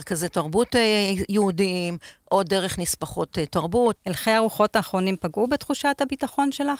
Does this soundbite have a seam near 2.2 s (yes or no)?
no